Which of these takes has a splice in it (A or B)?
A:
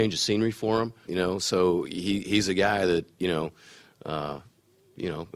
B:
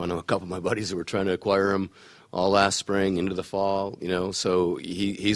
A